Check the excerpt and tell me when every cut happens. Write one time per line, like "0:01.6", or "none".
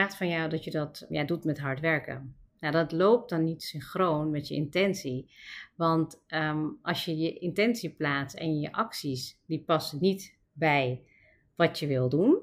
0:01.1